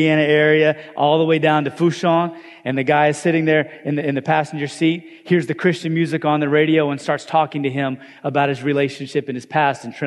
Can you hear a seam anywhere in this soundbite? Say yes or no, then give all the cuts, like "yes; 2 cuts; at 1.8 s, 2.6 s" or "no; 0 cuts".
no; 0 cuts